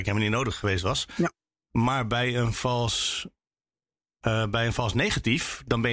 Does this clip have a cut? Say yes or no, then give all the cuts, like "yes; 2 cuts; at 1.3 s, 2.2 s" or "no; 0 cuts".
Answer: no; 0 cuts